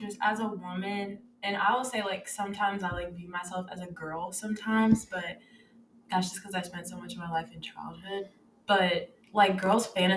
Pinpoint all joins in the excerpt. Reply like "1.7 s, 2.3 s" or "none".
9.2 s